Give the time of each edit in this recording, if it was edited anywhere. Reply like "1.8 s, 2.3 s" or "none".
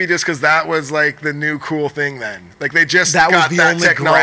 none

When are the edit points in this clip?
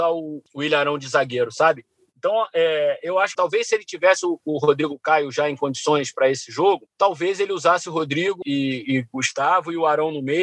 3.3 s, 8.4 s

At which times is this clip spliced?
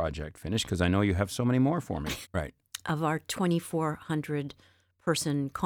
2.2 s

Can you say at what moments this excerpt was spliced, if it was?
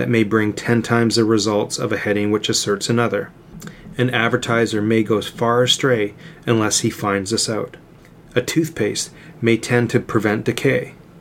none

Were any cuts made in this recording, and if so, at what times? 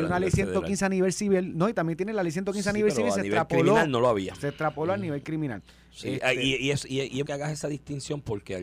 7.3 s

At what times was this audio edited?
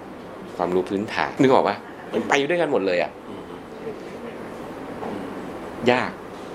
1.4 s

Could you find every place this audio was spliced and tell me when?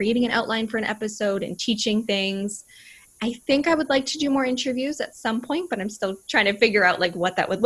none

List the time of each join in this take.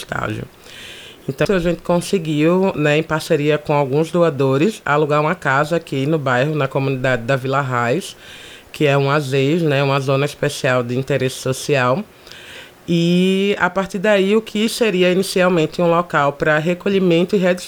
1.4 s

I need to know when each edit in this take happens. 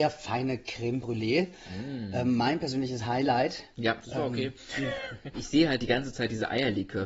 4.0 s, 5.3 s

